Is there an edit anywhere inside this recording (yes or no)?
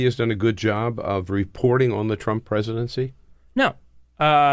no